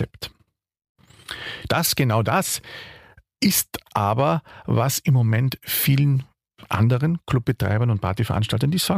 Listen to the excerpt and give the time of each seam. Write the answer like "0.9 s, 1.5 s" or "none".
1.7 s